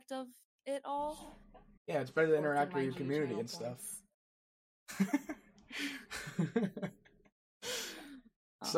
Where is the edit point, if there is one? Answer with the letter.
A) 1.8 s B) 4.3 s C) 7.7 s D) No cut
A